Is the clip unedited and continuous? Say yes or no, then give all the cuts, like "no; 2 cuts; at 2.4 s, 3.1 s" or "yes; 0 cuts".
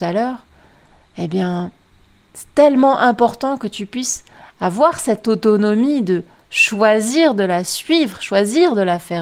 yes; 0 cuts